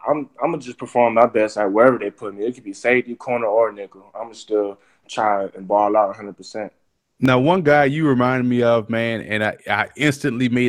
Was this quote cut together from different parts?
no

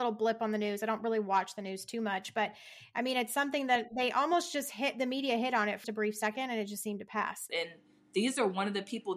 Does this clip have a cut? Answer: yes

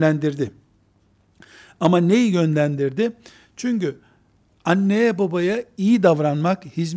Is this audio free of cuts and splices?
yes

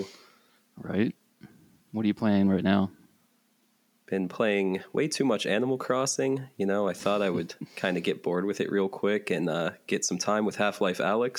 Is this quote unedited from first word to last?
yes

